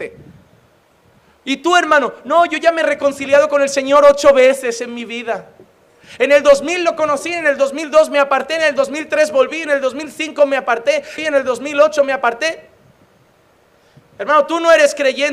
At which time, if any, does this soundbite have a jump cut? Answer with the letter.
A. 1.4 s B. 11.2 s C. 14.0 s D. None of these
B